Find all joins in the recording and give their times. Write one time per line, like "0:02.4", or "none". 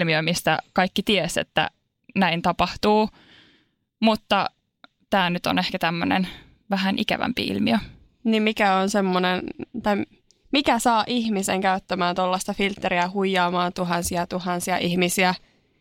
0:13.7

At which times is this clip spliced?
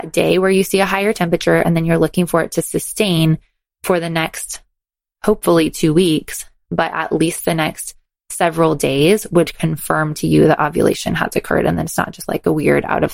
none

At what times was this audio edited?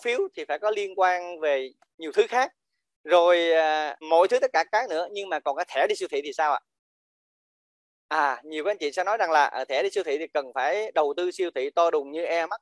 0:04.0

